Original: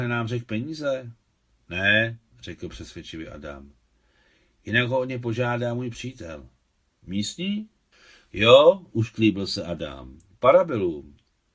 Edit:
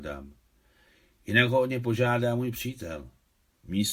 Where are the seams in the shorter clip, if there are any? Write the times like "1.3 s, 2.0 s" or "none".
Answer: none